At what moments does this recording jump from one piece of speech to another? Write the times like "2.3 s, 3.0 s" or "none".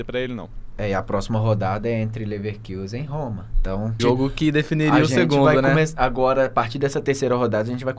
4.0 s